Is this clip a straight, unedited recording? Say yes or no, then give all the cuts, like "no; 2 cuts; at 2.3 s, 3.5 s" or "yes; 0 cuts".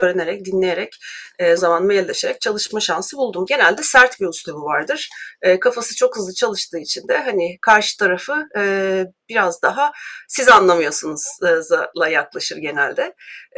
no; 2 cuts; at 1.6 s, 3.5 s